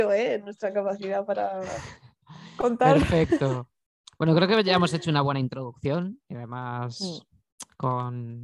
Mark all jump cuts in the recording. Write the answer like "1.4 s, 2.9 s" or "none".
none